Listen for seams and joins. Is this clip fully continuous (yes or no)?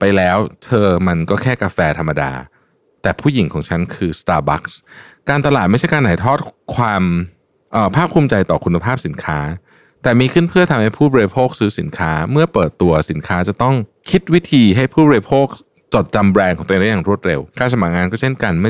no